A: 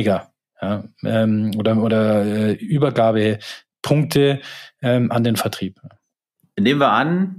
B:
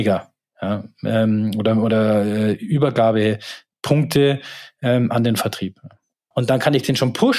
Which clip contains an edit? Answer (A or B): B